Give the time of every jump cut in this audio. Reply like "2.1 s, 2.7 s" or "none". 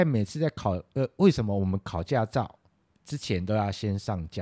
none